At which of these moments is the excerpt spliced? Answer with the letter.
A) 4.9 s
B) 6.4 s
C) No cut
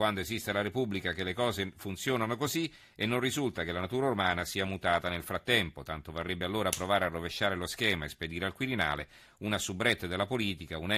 C